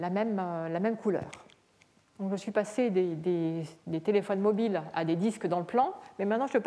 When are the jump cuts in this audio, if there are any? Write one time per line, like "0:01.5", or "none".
0:02.0